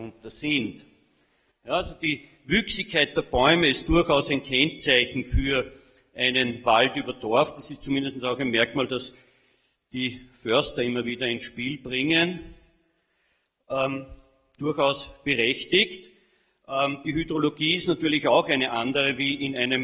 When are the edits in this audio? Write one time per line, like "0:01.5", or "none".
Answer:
none